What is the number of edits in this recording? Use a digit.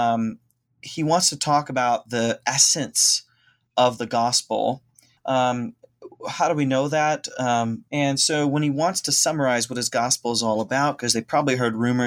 2